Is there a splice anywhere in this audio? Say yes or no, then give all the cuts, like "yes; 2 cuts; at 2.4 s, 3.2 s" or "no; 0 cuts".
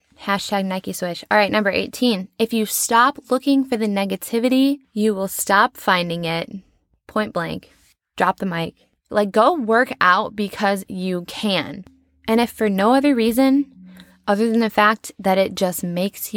yes; 1 cut; at 9.1 s